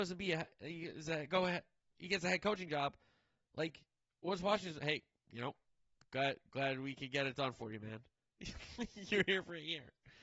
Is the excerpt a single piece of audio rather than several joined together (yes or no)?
yes